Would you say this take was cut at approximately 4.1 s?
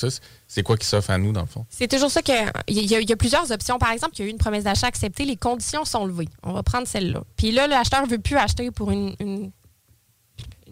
yes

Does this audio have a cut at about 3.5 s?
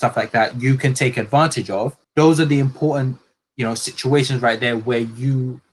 no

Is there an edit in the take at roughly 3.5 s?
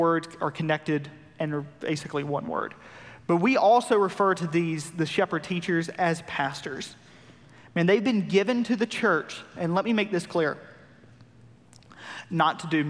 no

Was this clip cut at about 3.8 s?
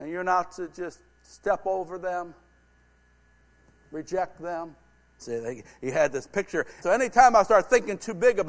no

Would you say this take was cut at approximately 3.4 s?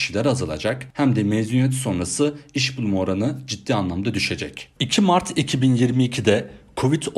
no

